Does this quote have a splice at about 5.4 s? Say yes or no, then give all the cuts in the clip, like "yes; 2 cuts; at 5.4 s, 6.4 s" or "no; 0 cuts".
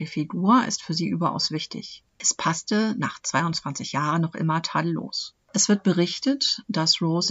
no; 1 cut; at 2.2 s